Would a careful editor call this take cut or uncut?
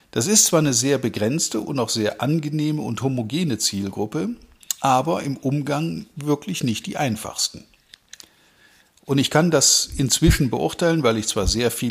uncut